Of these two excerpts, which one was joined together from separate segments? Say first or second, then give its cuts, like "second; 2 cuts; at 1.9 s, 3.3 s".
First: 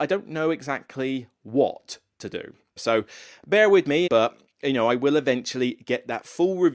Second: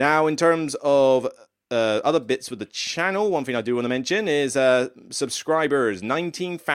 first; 2 cuts; at 2.8 s, 4.1 s